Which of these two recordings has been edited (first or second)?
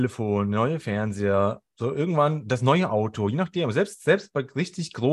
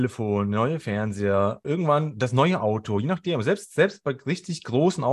second